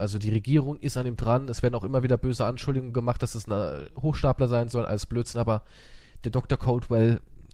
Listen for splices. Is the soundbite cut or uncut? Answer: uncut